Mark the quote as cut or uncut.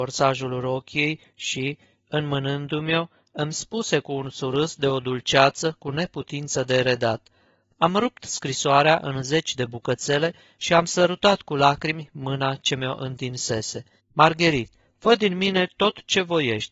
cut